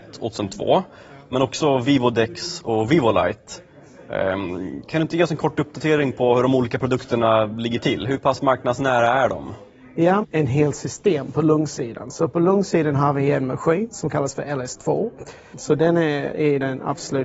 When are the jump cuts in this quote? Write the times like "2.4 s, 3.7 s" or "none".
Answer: 10.2 s, 15.5 s